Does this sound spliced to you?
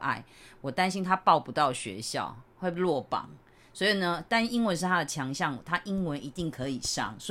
no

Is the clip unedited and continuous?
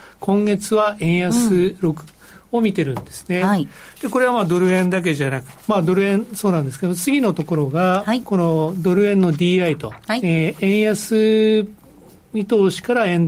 no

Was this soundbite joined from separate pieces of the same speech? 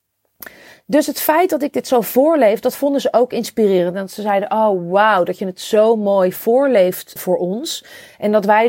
yes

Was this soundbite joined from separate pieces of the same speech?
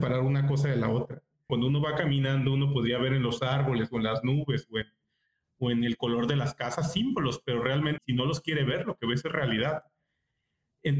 yes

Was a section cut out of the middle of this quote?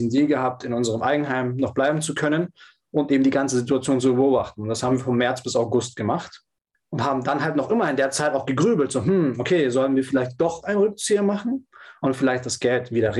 no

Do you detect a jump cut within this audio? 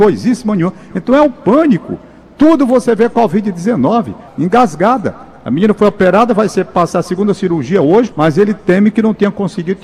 yes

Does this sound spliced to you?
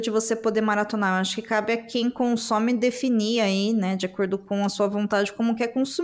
no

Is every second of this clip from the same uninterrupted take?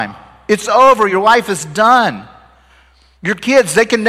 yes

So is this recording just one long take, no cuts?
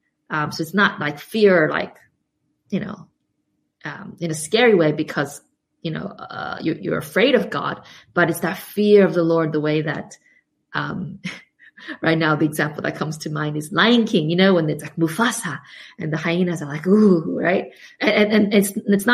yes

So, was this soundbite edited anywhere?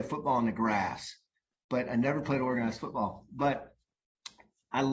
no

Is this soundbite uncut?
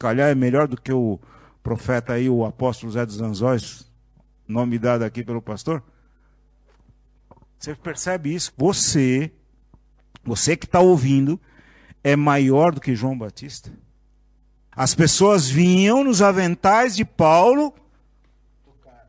no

